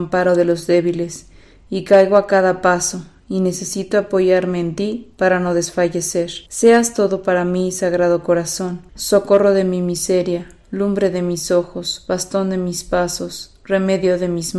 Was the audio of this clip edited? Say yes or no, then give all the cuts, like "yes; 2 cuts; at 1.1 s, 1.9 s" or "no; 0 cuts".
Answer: yes; 2 cuts; at 6.5 s, 8.9 s